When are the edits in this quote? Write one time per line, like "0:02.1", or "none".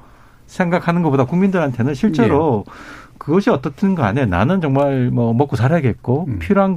none